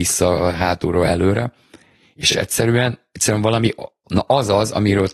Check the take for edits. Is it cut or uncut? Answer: uncut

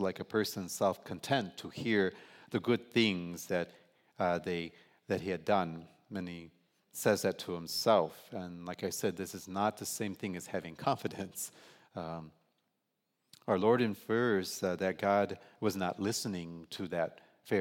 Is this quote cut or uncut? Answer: uncut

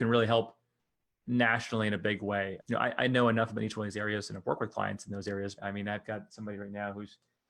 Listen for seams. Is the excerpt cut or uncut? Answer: cut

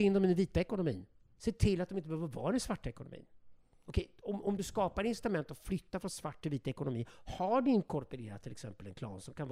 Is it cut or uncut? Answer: uncut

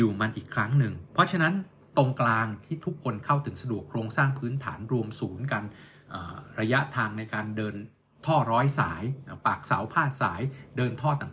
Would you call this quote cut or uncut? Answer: cut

